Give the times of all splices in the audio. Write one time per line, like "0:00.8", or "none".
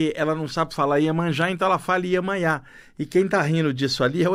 none